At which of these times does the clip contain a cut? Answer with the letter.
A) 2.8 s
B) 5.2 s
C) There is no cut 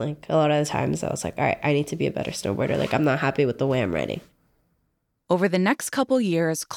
C